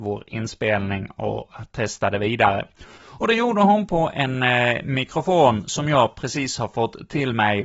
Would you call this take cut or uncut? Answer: cut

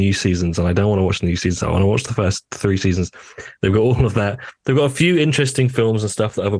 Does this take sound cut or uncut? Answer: uncut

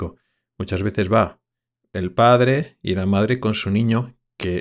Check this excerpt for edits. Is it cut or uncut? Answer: uncut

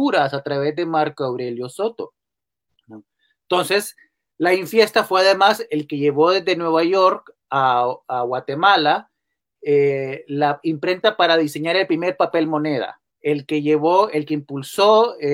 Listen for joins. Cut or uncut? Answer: cut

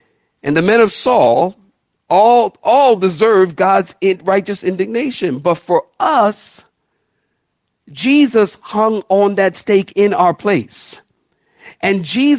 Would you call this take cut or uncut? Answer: uncut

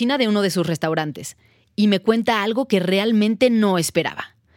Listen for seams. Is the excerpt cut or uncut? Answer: uncut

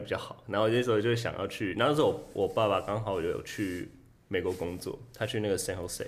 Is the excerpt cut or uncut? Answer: uncut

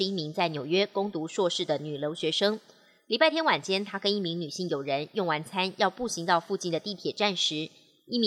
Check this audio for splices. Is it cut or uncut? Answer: uncut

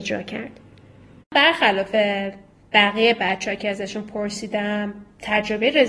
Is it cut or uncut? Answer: cut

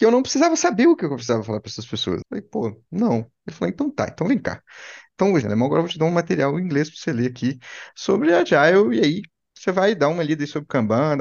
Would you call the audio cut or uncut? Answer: cut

